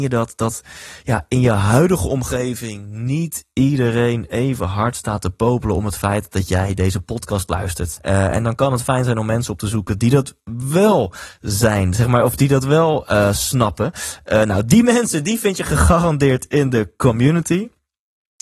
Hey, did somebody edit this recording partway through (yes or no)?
yes